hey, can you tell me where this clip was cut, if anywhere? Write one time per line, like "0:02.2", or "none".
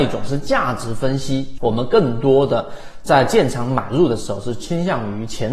0:01.6

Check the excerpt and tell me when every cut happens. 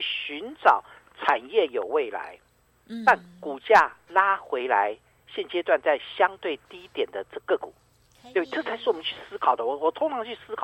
0:07.4

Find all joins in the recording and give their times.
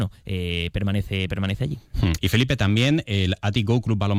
0:02.2

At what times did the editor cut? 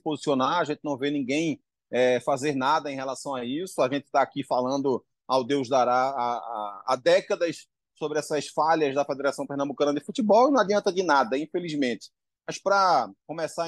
0:12.4

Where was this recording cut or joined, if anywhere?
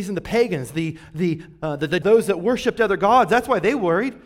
0:02.0

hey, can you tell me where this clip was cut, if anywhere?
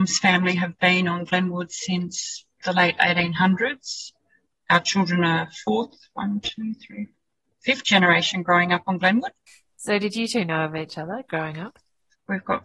none

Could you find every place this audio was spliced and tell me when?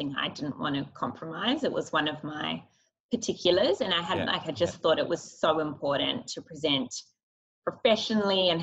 0:04.3

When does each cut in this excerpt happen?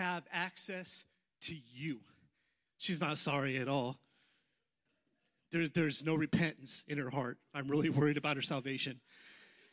0:02.7

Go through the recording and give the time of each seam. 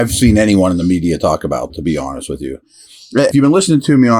0:03.3

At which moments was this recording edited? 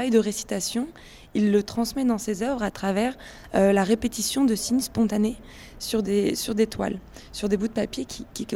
none

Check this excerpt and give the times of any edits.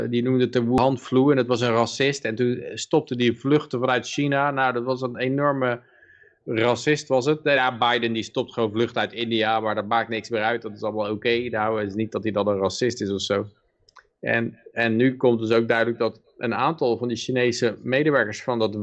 none

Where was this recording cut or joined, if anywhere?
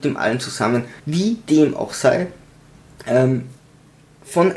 0:01.0

